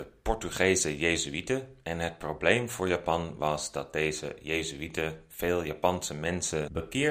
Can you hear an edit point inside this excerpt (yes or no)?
no